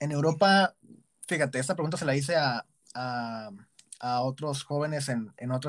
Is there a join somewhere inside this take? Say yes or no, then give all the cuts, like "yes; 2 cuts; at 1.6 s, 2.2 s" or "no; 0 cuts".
no; 0 cuts